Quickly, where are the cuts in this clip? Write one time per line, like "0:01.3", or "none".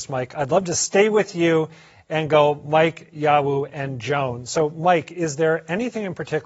none